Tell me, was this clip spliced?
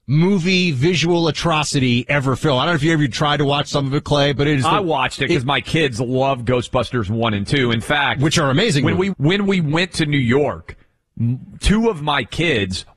yes; 1 cut; at 9.1 s

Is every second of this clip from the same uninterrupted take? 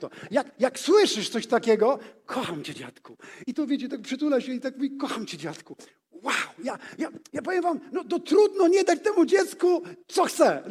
yes; 0 cuts

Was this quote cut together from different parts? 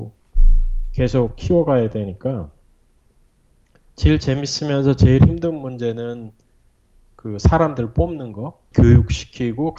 yes; 1 cut; at 8.7 s

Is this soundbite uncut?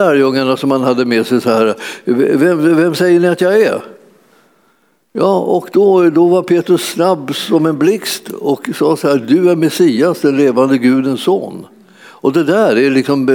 yes; 0 cuts

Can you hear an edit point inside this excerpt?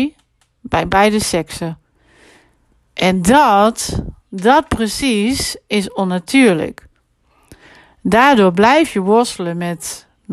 no; 0 cuts

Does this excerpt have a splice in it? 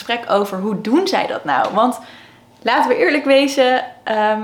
no; 0 cuts

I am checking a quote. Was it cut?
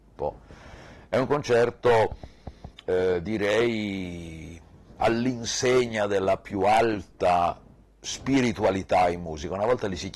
no; 0 cuts

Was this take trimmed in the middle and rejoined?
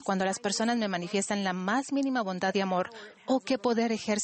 no; 0 cuts

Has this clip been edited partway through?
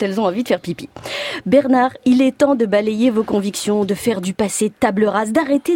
no; 0 cuts

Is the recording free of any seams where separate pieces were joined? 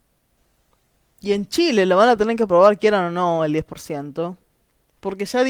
yes; 0 cuts

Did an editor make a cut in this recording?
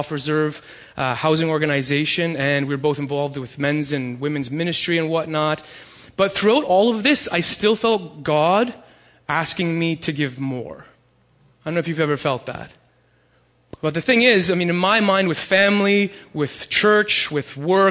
no; 0 cuts

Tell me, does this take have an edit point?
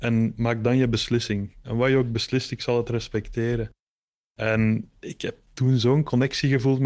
no; 0 cuts

